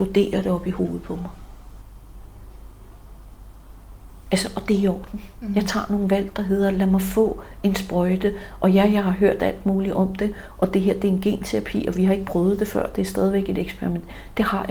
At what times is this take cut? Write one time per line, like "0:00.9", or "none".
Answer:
none